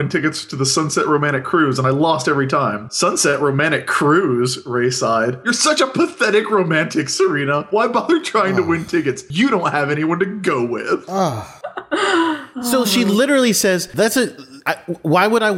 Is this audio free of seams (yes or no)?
yes